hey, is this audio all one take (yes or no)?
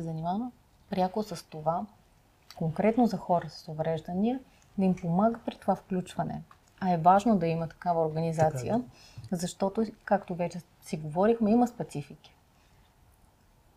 yes